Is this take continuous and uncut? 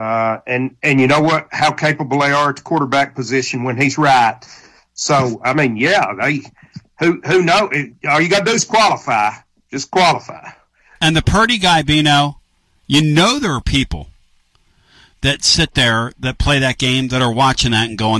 yes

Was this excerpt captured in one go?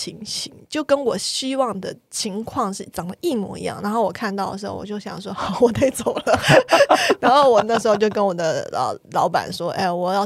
yes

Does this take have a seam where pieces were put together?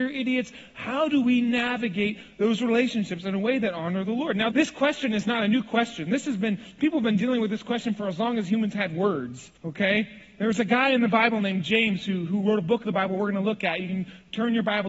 yes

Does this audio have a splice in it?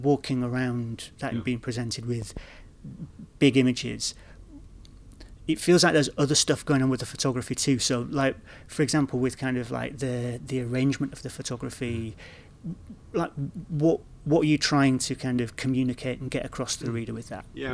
yes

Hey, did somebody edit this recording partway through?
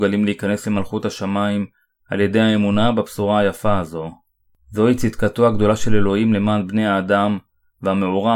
no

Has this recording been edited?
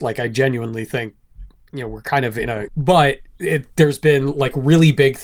yes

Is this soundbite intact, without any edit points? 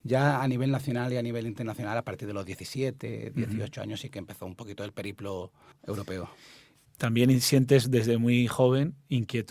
yes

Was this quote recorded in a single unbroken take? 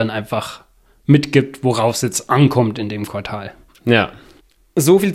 yes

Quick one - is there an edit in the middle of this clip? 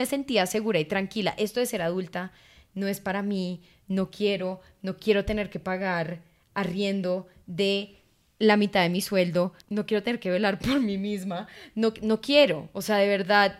no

